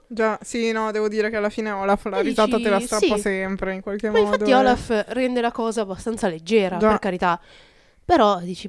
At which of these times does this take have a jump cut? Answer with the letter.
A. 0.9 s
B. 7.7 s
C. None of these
C